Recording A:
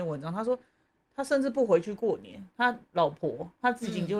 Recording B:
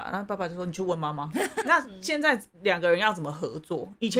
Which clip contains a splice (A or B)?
B